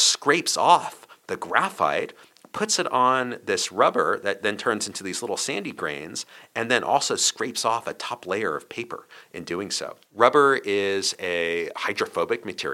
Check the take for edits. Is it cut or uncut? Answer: cut